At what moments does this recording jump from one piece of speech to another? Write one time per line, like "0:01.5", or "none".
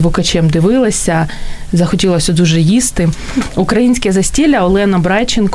none